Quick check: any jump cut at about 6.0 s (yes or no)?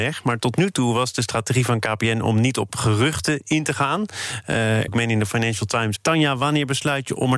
yes